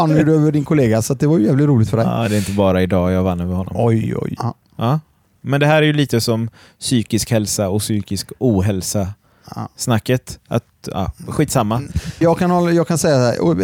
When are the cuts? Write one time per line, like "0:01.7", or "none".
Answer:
0:04.4
0:12.2